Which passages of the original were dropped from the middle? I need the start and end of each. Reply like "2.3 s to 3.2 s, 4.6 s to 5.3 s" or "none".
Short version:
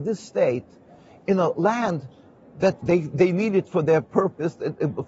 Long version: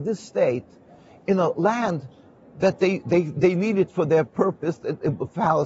2.8 s to 3.0 s